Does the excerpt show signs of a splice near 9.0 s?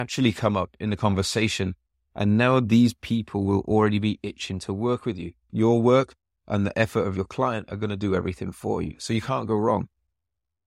no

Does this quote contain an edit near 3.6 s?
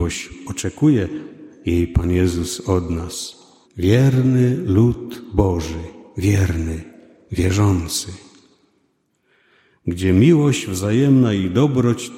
yes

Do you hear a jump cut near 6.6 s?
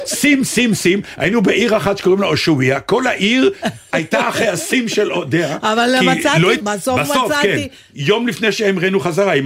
yes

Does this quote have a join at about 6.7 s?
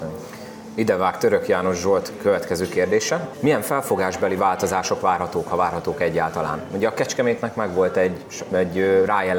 no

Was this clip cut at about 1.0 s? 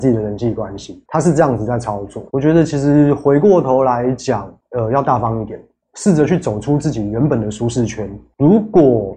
no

